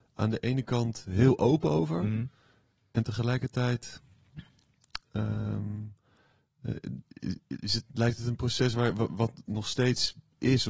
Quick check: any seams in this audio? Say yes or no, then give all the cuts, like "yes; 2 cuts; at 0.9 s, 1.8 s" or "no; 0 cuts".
no; 0 cuts